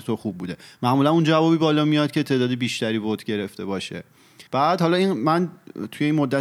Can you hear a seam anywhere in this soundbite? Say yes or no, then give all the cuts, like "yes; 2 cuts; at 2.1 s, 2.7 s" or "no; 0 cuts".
yes; 1 cut; at 4.5 s